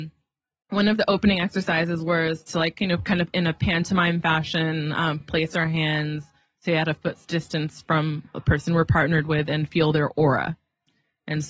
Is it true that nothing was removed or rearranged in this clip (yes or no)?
yes